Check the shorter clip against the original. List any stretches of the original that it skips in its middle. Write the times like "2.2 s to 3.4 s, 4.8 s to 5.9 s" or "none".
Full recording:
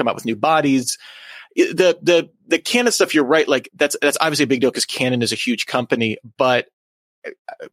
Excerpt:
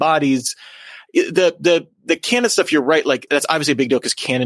3.7 s to 4.0 s